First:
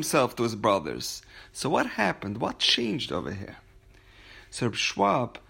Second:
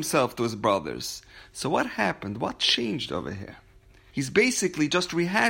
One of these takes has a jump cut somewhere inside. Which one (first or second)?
second